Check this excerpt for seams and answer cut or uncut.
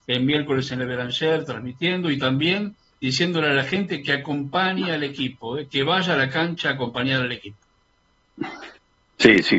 uncut